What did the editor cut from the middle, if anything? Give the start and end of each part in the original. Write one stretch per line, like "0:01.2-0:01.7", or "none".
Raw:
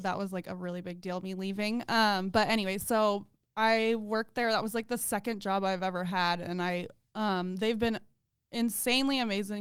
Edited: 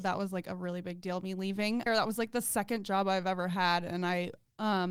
0:01.9-0:04.4